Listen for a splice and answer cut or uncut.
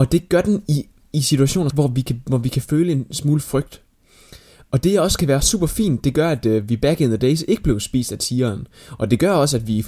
cut